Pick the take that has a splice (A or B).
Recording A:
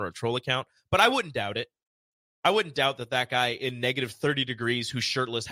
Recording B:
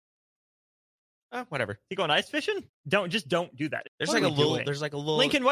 B